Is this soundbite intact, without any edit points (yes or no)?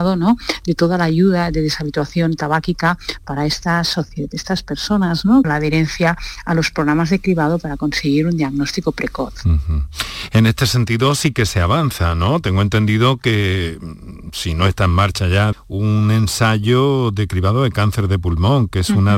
no